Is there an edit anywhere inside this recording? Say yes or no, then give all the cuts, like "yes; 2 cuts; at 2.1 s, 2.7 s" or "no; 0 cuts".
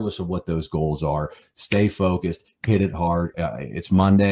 yes; 1 cut; at 3.3 s